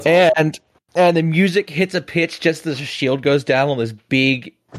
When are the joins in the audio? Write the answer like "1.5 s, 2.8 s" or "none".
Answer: none